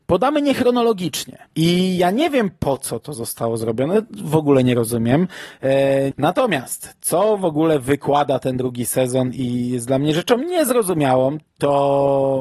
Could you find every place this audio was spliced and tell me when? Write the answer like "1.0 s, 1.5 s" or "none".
1.5 s, 6.1 s, 11.4 s